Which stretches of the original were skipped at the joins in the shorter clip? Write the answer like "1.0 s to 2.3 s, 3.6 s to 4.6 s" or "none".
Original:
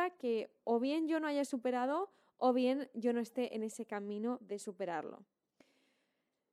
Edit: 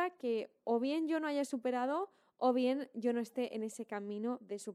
none

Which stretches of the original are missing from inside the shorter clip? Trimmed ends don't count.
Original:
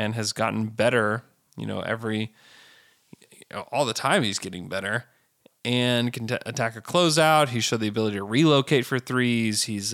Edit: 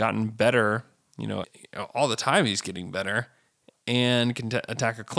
1.8 s to 3.2 s

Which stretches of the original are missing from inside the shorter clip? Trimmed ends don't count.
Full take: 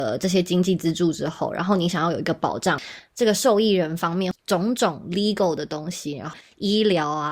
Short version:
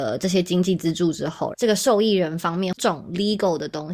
1.5 s to 3.1 s, 4.4 s to 4.7 s

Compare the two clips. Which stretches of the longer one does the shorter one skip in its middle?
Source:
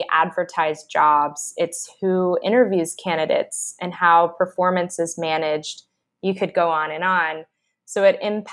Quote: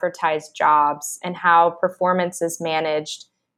1.5 s to 3.8 s

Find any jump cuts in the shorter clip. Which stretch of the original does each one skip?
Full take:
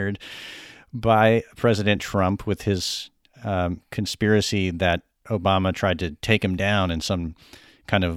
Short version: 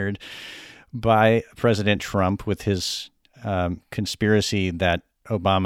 none

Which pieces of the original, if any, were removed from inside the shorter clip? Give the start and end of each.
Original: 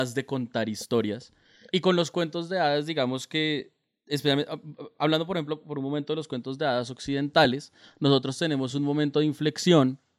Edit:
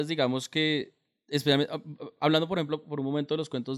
none

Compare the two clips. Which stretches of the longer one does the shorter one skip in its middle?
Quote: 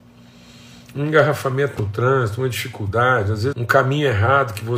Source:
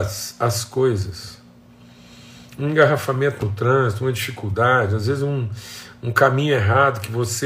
5.2 s to 6.0 s

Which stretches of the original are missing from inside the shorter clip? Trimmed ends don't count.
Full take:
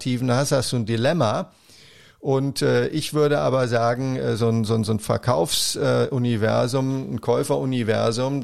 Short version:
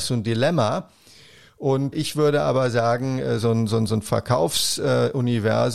2.5 s to 2.9 s

